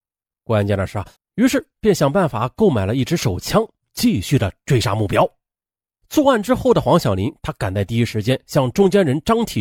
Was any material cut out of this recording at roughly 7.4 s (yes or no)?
no